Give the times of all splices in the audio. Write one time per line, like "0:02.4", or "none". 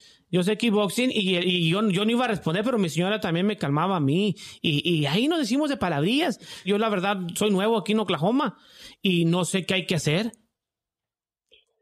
0:06.6